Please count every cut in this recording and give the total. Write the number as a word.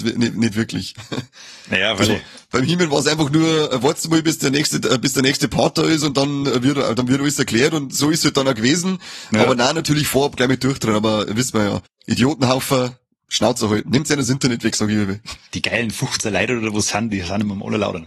one